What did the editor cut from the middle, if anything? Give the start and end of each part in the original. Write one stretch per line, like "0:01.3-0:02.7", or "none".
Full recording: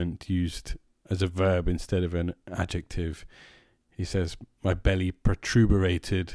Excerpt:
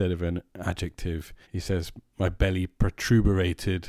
0:03.4-0:03.9